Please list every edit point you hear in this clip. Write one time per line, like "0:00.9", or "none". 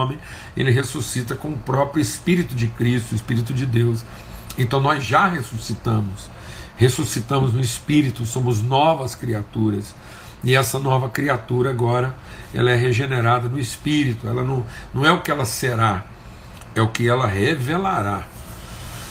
none

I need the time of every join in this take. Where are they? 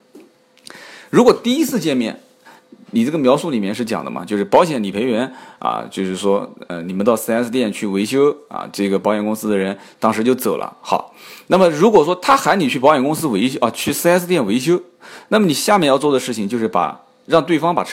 none

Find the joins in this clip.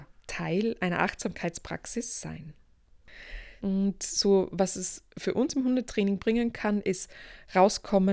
0:03.6

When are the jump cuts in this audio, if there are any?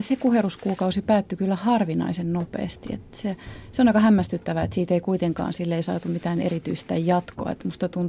none

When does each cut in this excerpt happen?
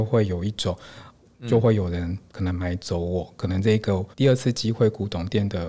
0:01.3
0:04.1

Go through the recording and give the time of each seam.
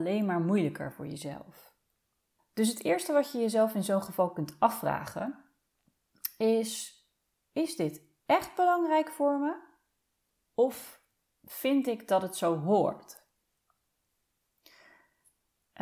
0:02.4

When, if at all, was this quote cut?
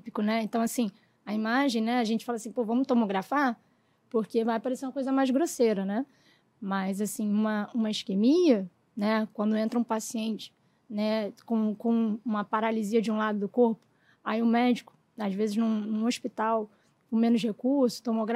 none

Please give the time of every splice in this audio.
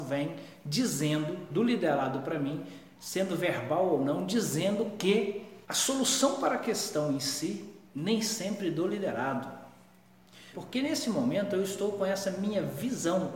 0:05.6
0:07.9
0:10.5

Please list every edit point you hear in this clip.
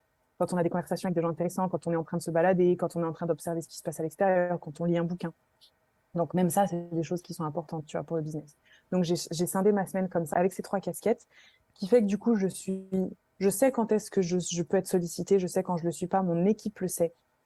0:10.3

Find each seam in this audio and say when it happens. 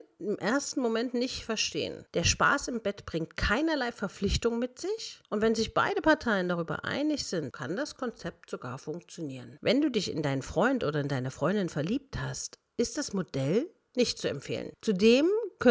0:07.5
0:09.6

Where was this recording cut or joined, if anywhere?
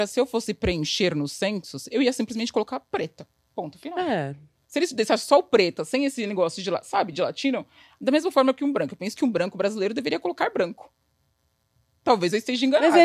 none

